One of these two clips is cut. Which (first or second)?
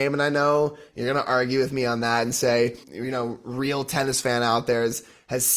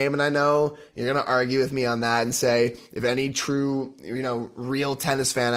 first